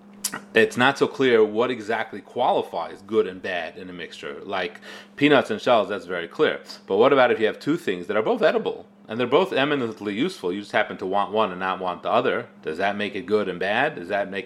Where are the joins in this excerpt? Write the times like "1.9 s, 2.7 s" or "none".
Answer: 12.6 s